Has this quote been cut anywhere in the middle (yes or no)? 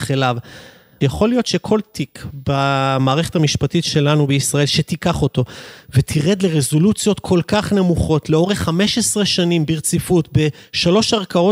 no